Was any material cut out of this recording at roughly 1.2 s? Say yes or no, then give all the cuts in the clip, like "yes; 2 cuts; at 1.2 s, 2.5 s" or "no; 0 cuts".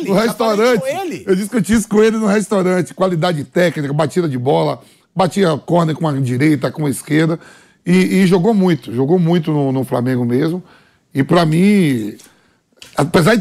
no; 0 cuts